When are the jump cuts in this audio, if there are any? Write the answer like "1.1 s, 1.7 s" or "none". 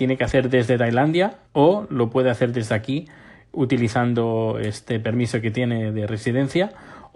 1.4 s